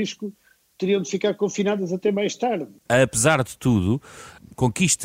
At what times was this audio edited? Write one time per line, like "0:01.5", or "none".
none